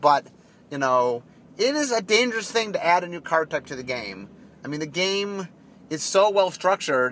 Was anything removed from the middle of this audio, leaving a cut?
no; 0 cuts

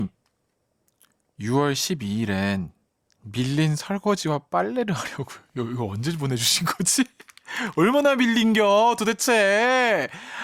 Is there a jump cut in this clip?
no; 0 cuts

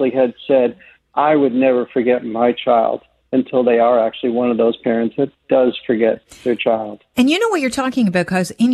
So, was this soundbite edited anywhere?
no; 0 cuts

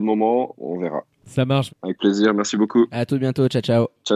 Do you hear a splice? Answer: yes; 1 cut; at 1.7 s

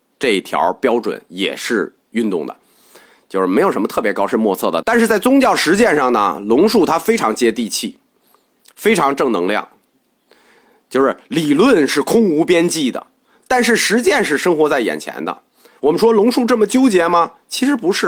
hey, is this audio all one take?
no; 1 cut; at 4.8 s

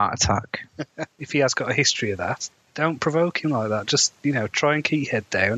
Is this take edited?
yes; 1 cut; at 1.1 s

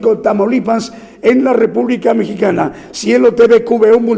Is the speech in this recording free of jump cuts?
yes; 0 cuts

